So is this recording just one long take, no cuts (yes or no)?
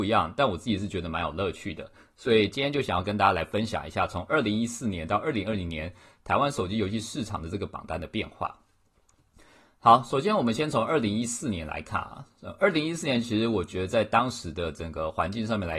yes